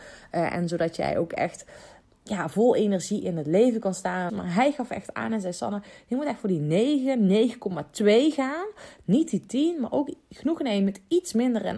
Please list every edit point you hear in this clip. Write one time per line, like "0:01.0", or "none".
0:04.3